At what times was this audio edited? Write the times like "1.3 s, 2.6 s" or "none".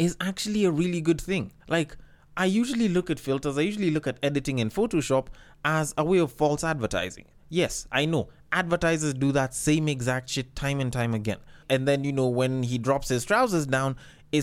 1.6 s, 11.6 s